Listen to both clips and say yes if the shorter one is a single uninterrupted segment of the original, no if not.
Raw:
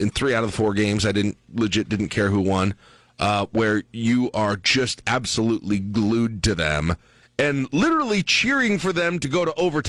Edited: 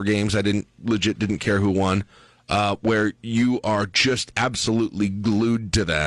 yes